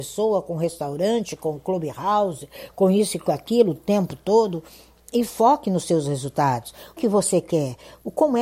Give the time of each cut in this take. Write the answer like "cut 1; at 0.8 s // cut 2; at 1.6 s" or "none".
cut 1; at 7.0 s

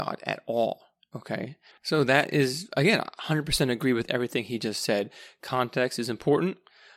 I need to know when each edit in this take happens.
cut 1; at 1.7 s

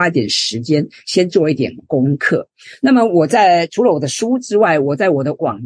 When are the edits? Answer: none

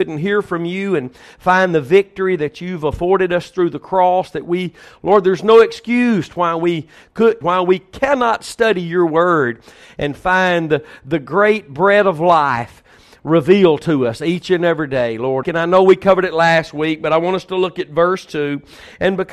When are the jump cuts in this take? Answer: cut 1; at 7.4 s // cut 2; at 15.4 s

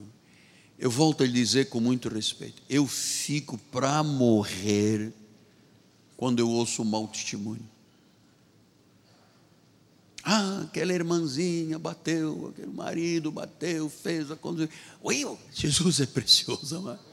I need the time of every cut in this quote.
cut 1; at 15.5 s

